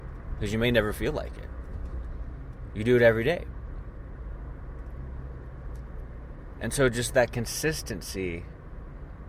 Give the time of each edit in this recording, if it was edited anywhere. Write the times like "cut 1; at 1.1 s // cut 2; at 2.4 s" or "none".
none